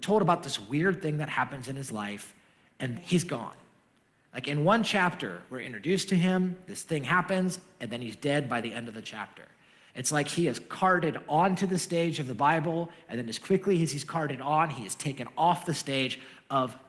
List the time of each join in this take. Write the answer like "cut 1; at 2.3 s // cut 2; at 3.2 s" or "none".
cut 1; at 2.9 s

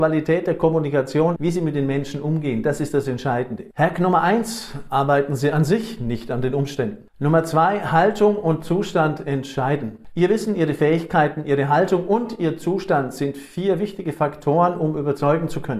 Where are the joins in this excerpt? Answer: cut 1; at 1.4 s // cut 2; at 3.7 s

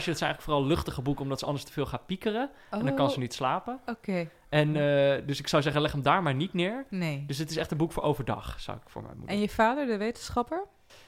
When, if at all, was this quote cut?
none

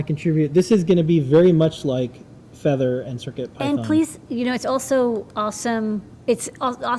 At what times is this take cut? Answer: none

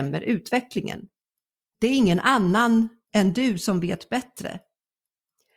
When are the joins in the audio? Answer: cut 1; at 1.7 s

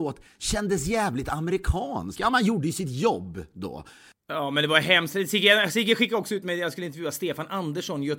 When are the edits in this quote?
cut 1; at 2.1 s

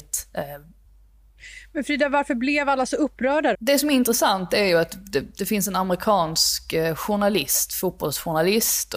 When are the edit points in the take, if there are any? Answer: cut 1; at 3.5 s

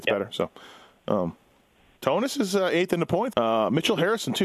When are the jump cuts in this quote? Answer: cut 1; at 2.0 s // cut 2; at 3.3 s

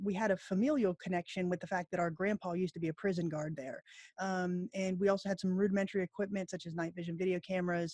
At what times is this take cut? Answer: cut 1; at 4.1 s

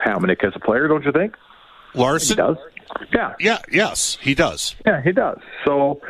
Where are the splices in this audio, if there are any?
none

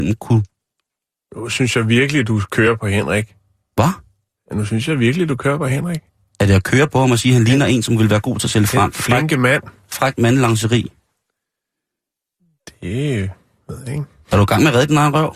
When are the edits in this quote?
none

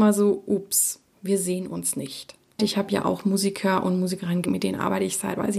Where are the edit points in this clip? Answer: cut 1; at 2.6 s // cut 2; at 4.5 s

